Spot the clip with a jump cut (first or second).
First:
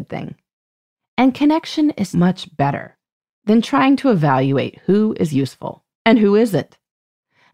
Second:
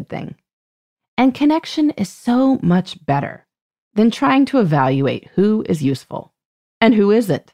first